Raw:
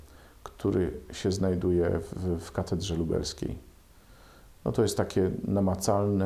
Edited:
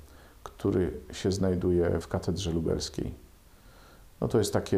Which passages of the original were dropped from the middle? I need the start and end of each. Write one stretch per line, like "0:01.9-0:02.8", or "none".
0:02.0-0:02.4